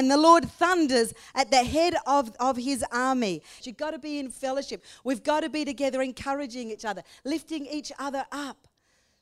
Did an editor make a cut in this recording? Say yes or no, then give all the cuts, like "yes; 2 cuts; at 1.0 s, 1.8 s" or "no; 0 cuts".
yes; 1 cut; at 3.6 s